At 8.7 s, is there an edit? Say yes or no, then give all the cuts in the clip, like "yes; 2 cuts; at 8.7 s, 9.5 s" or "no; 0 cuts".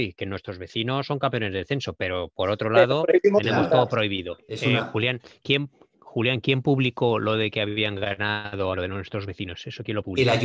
yes; 2 cuts; at 4.4 s, 8.7 s